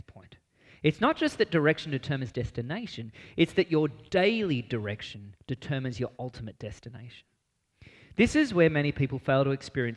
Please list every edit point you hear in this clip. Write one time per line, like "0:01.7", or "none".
none